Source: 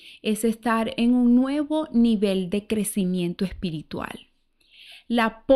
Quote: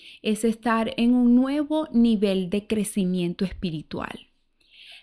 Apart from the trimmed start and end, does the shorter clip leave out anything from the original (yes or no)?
no